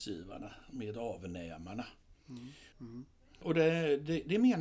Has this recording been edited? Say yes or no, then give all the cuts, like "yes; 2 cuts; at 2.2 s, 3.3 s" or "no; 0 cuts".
yes; 1 cut; at 2.7 s